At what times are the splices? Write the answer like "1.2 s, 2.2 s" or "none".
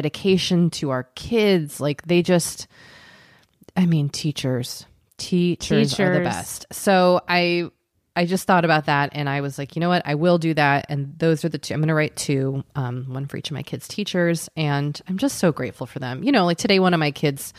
none